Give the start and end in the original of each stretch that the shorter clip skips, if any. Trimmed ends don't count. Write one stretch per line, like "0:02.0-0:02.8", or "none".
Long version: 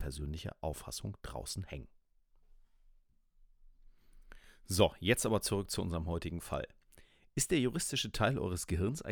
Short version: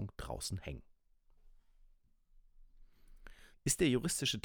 0:04.6-0:07.2